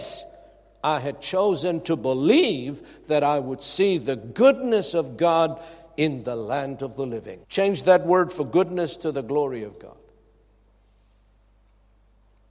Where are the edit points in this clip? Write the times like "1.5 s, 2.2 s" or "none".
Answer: 7.4 s